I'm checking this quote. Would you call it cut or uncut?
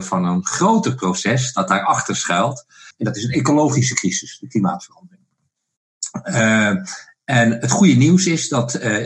cut